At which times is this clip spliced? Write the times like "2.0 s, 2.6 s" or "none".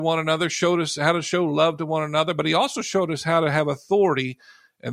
none